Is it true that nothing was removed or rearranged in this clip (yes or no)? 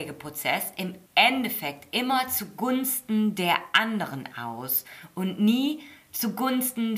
no